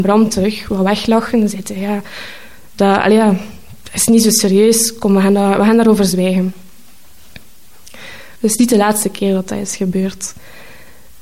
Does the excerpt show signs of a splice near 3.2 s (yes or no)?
no